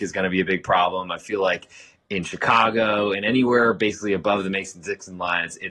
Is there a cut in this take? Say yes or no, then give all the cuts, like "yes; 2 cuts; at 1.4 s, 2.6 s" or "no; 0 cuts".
no; 0 cuts